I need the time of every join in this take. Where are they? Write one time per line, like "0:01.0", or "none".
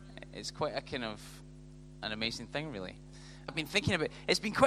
0:03.5